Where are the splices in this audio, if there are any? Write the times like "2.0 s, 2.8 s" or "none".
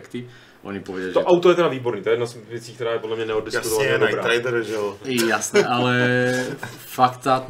5.6 s